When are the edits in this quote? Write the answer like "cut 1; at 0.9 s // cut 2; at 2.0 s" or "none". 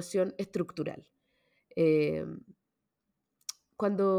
none